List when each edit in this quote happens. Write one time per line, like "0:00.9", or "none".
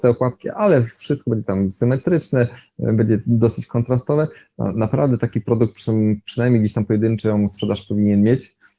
none